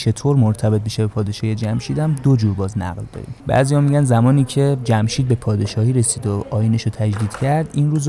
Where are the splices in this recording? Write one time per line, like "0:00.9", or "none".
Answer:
0:03.4